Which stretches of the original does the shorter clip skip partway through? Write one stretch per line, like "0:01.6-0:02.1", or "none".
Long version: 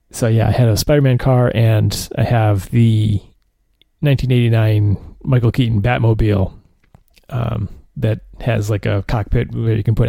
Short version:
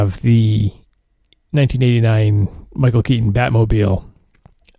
none